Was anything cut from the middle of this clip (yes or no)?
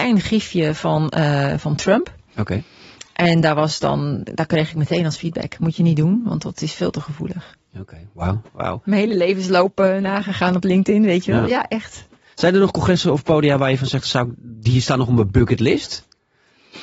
yes